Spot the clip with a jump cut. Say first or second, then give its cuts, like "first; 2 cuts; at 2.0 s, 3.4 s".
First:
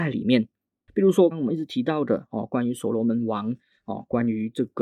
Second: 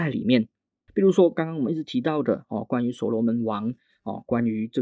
first; 1 cut; at 1.3 s